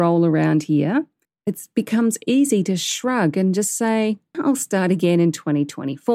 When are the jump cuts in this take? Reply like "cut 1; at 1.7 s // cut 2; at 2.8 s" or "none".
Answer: cut 1; at 1.3 s // cut 2; at 4.3 s